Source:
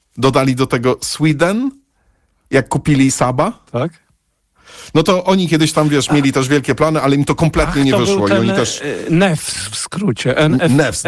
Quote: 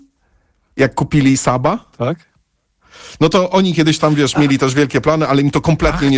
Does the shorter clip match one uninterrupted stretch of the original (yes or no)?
yes